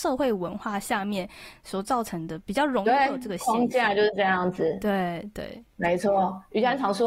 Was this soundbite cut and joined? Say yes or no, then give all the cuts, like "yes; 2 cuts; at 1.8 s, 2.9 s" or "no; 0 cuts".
no; 0 cuts